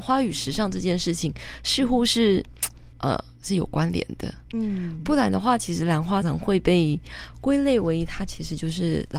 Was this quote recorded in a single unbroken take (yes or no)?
no